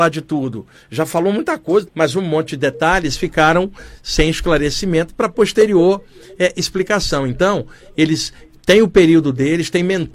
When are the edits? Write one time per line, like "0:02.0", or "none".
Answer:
0:01.9

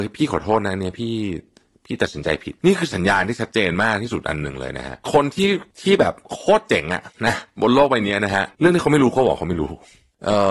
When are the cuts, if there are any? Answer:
none

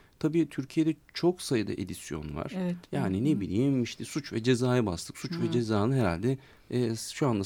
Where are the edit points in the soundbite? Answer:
none

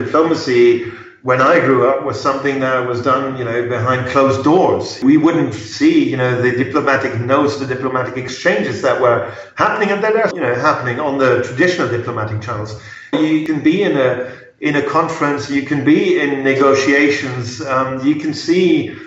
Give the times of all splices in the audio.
0:10.3
0:13.1

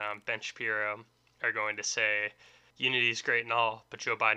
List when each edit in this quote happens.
0:02.7

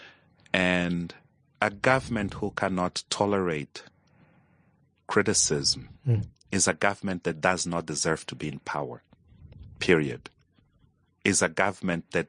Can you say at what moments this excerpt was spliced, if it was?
none

